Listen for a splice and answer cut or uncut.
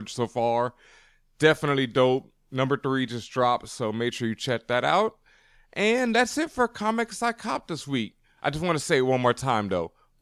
uncut